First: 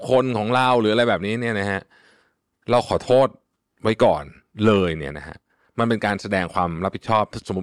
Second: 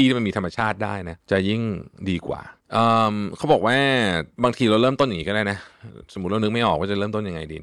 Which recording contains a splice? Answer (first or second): second